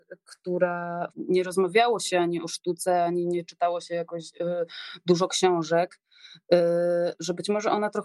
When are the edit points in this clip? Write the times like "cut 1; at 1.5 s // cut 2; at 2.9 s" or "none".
cut 1; at 1.1 s

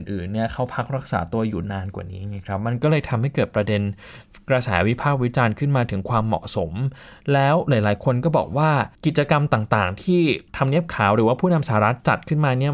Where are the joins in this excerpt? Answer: cut 1; at 8.9 s // cut 2; at 10.5 s

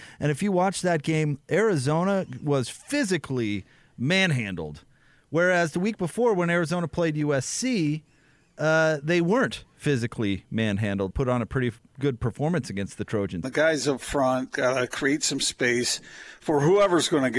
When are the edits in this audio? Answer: cut 1; at 11.1 s // cut 2; at 13.4 s

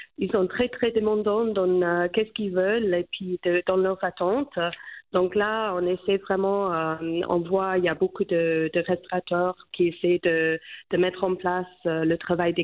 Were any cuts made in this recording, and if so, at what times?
cut 1; at 9.7 s

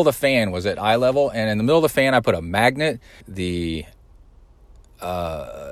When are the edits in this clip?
cut 1; at 3.2 s

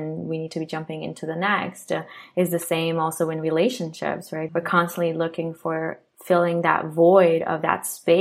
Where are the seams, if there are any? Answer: cut 1; at 4.5 s

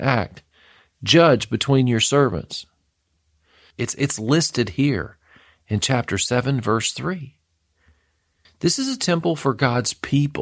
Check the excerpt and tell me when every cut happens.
cut 1; at 3.7 s // cut 2; at 8.5 s

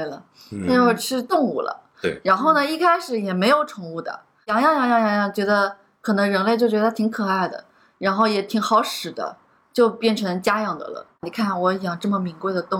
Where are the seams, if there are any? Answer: cut 1; at 11.2 s

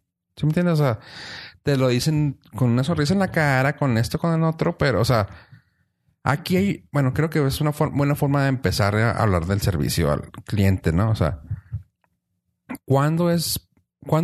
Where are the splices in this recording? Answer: none

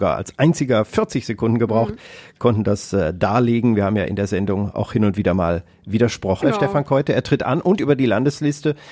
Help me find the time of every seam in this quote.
cut 1; at 6.4 s

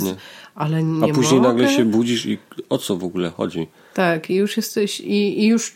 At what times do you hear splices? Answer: none

